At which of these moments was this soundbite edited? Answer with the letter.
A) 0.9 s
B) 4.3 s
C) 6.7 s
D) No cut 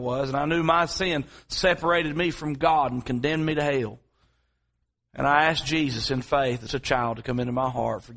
C